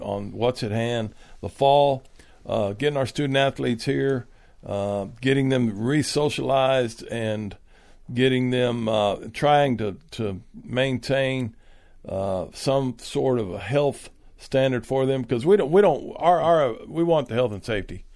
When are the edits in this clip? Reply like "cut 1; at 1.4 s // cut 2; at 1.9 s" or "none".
none